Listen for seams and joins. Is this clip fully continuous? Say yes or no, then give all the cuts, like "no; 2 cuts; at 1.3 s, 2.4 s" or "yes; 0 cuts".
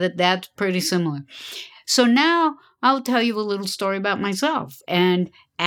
no; 1 cut; at 1.8 s